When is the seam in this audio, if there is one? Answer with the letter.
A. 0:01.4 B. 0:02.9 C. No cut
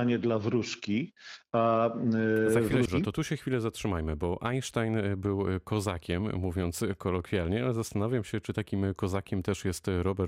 B